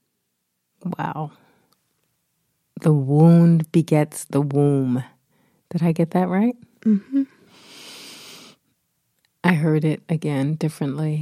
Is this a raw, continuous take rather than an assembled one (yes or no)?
yes